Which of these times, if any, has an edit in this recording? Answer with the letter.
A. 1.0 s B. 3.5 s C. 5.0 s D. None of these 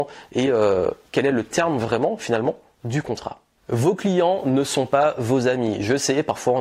D